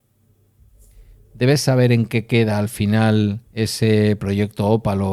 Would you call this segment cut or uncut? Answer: cut